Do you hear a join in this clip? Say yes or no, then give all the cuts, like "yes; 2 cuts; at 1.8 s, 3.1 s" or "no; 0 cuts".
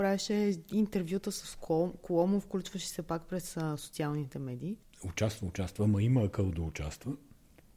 yes; 1 cut; at 4.9 s